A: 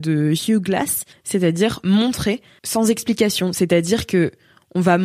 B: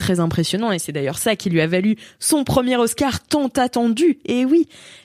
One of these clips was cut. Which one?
A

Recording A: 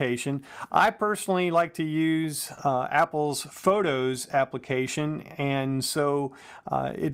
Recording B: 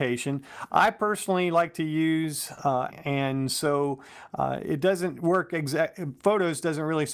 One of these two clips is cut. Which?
B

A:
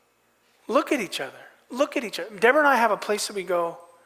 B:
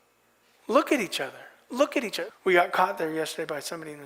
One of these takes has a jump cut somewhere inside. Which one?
B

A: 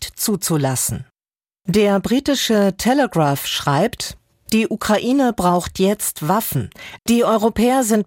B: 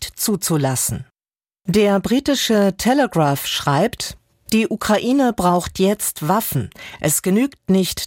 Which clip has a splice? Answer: A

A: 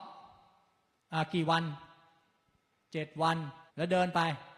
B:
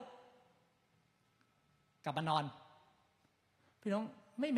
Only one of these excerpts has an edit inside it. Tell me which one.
A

